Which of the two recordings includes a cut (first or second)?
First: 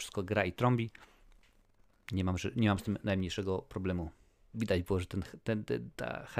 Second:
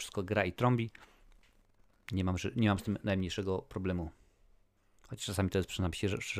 first